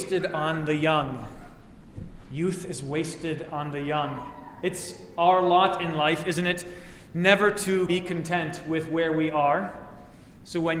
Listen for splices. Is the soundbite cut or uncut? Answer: cut